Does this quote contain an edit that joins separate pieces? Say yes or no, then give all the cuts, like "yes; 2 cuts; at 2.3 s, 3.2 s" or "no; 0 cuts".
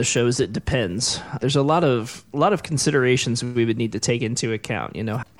no; 0 cuts